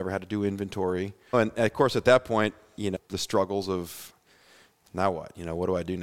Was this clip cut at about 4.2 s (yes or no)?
no